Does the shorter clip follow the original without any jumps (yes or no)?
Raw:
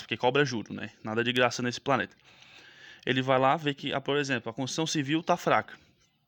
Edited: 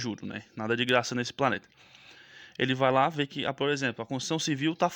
yes